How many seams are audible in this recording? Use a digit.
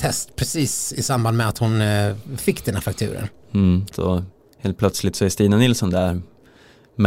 1